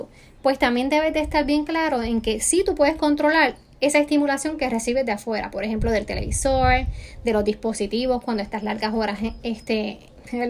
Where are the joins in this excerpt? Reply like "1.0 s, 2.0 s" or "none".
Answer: none